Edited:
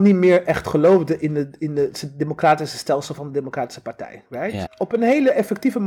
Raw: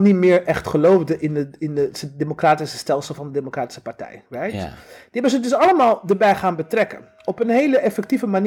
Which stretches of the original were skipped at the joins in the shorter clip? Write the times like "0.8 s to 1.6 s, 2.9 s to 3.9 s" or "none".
4.7 s to 7.1 s